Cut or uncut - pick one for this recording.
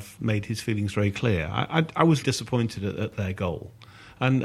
cut